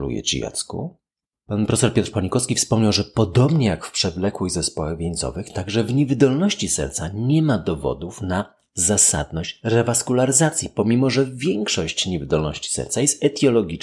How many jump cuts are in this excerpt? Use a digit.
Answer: 1